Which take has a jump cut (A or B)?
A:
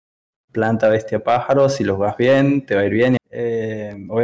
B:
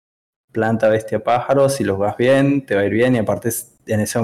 A